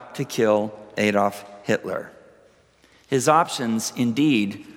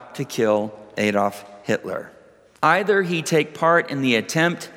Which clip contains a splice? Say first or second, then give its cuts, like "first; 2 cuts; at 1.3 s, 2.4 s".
second; 1 cut; at 2.5 s